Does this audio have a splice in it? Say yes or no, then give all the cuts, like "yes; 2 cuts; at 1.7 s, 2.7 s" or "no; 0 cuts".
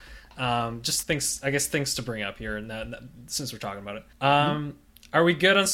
yes; 2 cuts; at 1.0 s, 4.1 s